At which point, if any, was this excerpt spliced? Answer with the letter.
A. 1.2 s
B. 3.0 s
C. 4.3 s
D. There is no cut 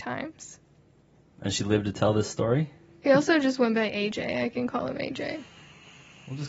B